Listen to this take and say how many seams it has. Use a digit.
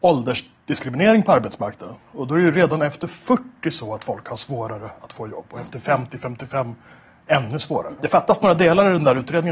1